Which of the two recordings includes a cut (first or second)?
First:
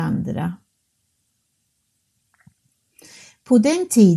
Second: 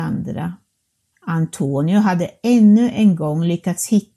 second